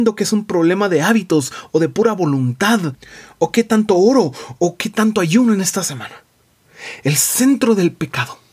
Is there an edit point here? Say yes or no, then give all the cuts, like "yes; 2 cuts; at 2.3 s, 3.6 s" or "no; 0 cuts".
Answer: no; 0 cuts